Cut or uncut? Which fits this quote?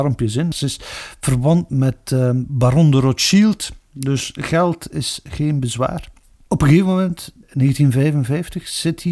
cut